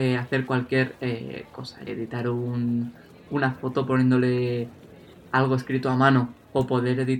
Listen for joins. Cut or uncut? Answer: cut